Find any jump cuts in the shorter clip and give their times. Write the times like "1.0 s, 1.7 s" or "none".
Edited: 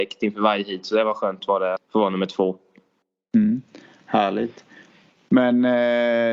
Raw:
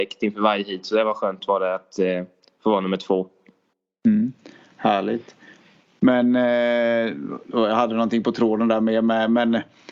1.8 s